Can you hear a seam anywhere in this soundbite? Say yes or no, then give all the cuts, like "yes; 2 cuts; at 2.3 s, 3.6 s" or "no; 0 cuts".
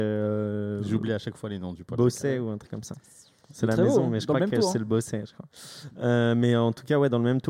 no; 0 cuts